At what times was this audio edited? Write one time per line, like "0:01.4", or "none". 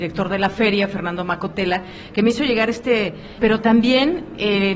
0:03.4